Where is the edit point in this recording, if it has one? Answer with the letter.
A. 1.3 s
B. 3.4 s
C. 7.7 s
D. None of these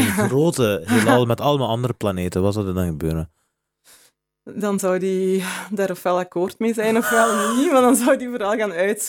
D